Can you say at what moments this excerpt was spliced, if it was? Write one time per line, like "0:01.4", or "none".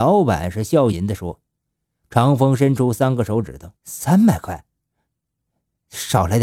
0:00.9
0:03.8